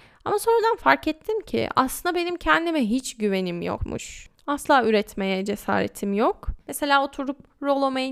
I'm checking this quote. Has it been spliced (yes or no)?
yes